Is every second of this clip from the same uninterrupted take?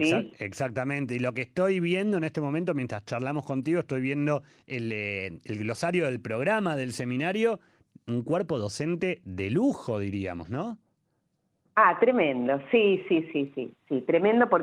yes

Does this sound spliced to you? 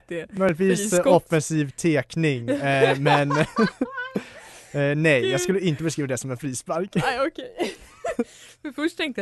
no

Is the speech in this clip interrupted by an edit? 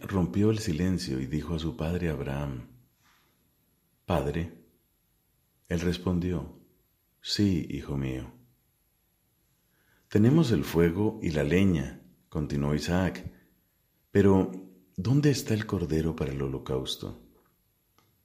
no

